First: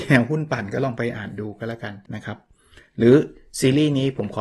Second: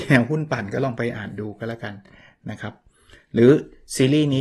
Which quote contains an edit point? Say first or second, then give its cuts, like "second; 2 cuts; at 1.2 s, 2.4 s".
first; 1 cut; at 2.1 s